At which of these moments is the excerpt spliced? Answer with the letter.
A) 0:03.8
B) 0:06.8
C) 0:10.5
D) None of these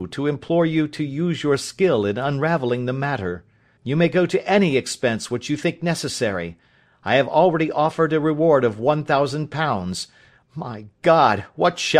A